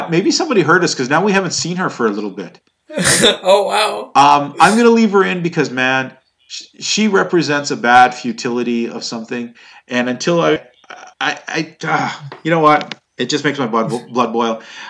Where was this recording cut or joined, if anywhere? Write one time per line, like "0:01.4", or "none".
0:10.6